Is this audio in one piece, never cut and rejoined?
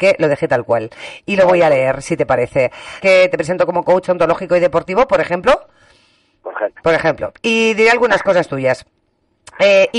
no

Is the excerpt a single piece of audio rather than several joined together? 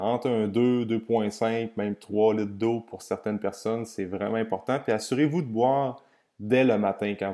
yes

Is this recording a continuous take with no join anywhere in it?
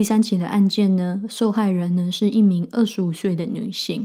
yes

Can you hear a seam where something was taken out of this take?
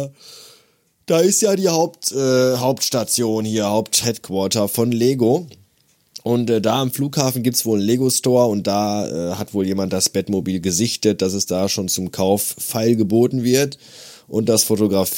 yes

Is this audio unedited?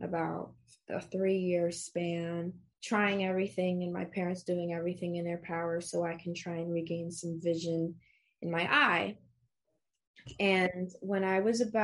no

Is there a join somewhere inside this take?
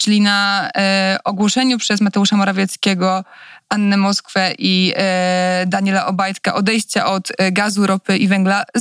no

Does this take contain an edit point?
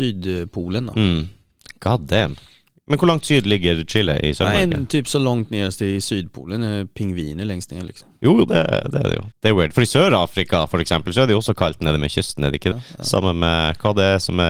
yes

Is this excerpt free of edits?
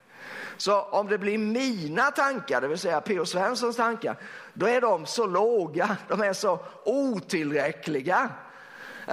yes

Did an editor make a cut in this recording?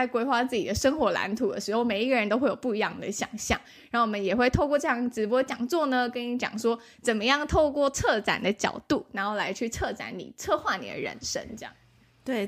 no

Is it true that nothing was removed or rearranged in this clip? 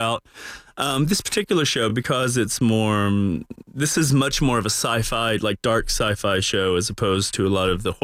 yes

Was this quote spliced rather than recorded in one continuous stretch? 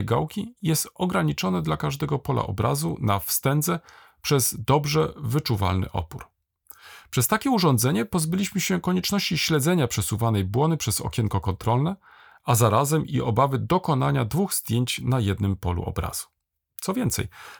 no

